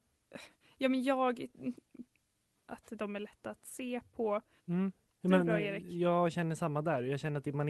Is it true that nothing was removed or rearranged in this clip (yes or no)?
no